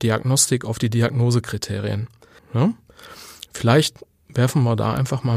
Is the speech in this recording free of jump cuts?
no; 1 cut; at 2.4 s

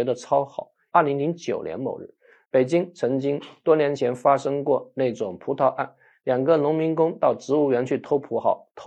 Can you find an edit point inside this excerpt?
yes; 2 cuts; at 0.9 s, 2.4 s

